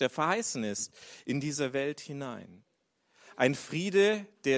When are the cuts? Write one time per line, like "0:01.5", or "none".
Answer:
none